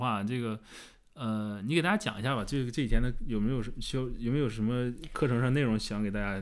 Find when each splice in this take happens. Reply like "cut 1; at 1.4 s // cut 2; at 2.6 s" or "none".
none